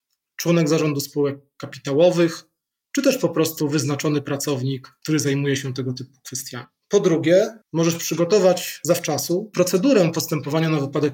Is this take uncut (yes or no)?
no